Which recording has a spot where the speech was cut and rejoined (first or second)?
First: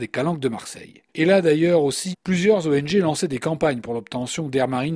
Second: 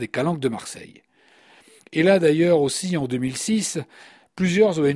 first